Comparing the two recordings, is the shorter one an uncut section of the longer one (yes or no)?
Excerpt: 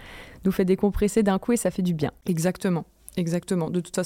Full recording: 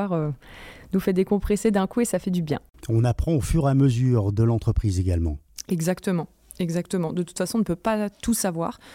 no